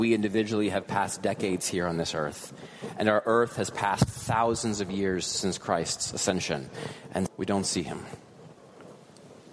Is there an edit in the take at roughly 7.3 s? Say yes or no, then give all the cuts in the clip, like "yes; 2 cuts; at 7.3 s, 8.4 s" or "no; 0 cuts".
yes; 1 cut; at 7.3 s